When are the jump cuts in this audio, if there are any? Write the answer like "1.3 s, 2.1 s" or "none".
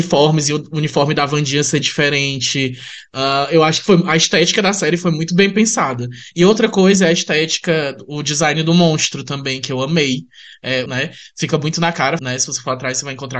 6.3 s, 10.9 s, 12.2 s